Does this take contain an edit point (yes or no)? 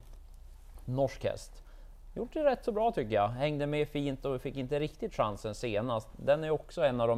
no